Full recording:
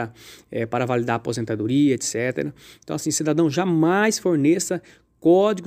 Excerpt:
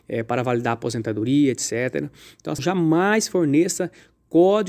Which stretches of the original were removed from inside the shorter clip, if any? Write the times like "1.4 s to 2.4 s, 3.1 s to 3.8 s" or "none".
3.0 s to 3.5 s